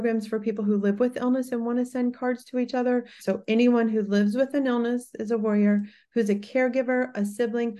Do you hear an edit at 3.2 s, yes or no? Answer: yes